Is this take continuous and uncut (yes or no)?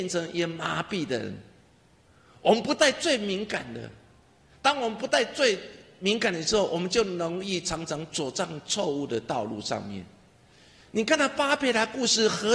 yes